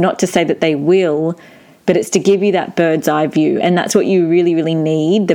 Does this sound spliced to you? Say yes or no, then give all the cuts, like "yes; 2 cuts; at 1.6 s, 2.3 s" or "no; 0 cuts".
no; 0 cuts